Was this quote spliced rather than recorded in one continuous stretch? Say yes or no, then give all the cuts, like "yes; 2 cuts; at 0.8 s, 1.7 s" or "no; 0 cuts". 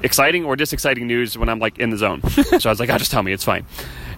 yes; 1 cut; at 2.6 s